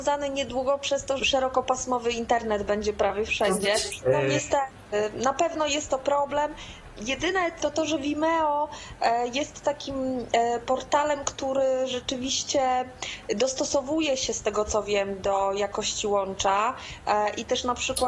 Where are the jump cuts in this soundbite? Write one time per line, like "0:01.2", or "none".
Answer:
0:01.2
0:04.0
0:07.6